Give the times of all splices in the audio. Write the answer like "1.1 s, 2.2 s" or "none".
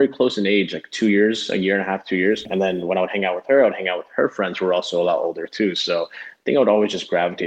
2.5 s